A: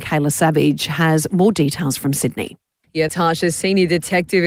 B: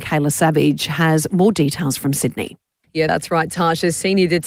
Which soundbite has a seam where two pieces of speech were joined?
A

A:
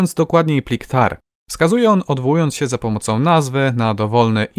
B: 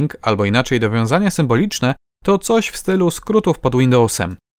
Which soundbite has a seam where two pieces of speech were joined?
A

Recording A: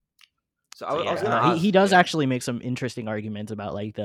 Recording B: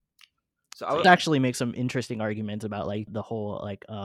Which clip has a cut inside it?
B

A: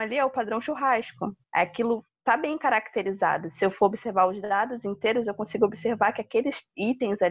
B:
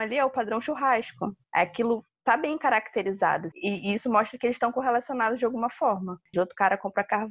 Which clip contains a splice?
B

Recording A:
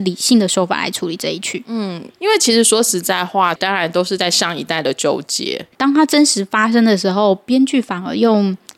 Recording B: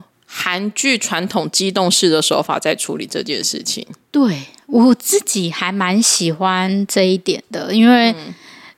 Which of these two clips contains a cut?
A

